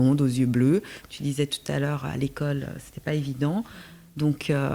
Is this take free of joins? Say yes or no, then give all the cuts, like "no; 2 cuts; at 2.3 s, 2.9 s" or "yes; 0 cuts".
no; 1 cut; at 1.0 s